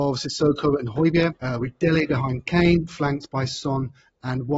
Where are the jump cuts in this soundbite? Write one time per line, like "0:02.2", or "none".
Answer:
0:01.4